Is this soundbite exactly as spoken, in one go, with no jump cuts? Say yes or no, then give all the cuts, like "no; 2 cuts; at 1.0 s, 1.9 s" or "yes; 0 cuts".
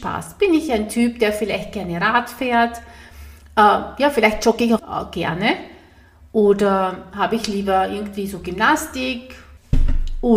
no; 1 cut; at 4.8 s